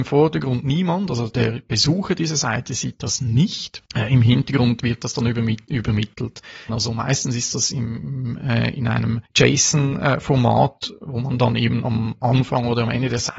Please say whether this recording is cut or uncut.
cut